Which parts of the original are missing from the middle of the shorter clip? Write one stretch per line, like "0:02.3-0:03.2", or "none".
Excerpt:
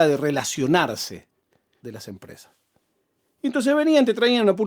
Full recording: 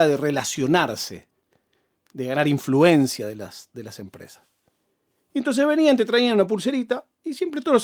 0:01.8-0:03.7